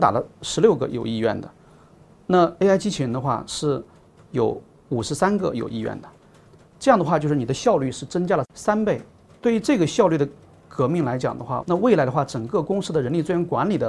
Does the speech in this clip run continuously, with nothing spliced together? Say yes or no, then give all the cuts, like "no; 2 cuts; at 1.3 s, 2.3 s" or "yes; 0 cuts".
no; 1 cut; at 11.6 s